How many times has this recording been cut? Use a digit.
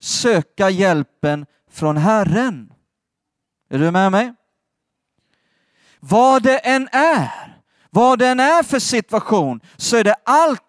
0